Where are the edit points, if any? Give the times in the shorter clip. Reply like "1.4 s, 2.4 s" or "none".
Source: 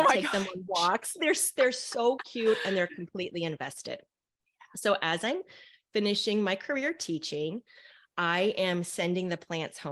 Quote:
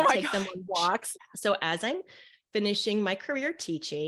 1.1 s

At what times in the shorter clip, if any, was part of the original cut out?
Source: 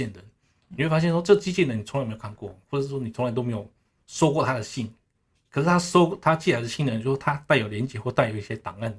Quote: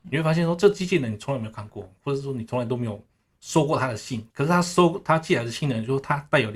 4.3 s

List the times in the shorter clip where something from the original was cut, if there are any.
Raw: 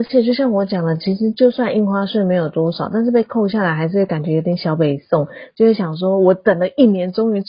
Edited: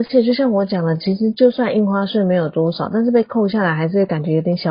none

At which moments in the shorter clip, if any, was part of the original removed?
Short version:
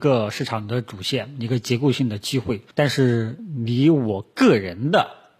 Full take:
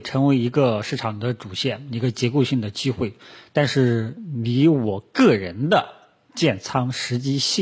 2.7 s

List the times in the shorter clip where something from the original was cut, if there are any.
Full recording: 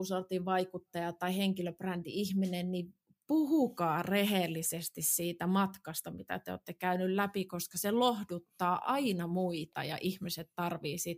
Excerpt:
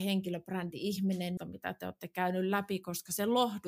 1.4 s

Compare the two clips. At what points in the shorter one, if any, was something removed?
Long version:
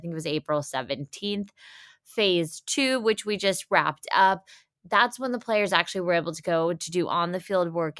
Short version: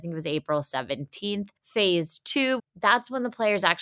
1.6 s, 2.6 s

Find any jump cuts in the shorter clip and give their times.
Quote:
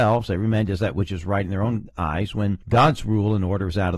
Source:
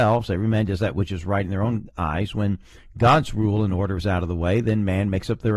2.6 s

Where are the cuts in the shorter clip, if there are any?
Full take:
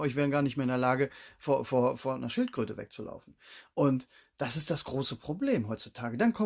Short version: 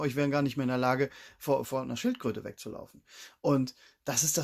1.6 s

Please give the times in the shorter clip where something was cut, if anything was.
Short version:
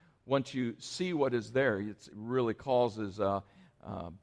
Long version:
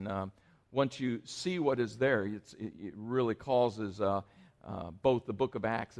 2.1 s

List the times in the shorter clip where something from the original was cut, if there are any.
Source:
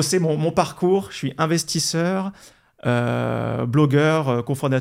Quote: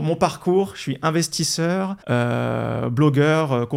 2.0 s

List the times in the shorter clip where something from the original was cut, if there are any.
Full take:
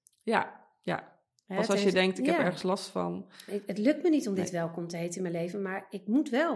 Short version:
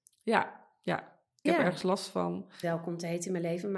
1.5 s, 2.6 s

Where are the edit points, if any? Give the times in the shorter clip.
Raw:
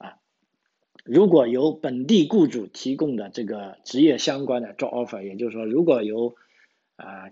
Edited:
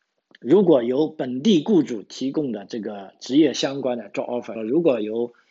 4.6 s

